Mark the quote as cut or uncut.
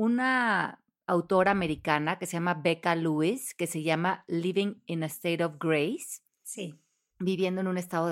uncut